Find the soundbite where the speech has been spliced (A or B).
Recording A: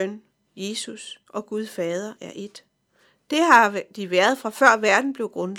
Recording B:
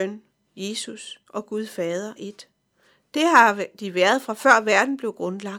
B